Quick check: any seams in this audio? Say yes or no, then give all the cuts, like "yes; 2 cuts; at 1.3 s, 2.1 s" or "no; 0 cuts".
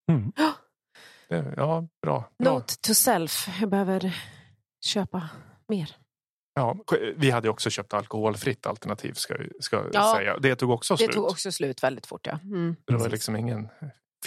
no; 0 cuts